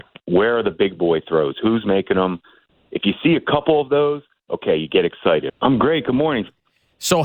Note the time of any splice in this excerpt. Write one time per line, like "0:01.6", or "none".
0:05.5